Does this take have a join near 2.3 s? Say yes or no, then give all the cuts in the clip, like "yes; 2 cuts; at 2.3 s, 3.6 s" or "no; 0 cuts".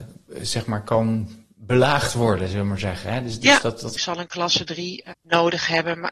no; 2 cuts; at 4.0 s, 5.1 s